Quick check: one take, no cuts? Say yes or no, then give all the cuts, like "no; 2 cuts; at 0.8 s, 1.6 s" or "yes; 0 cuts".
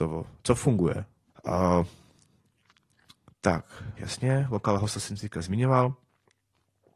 no; 2 cuts; at 1.3 s, 4.0 s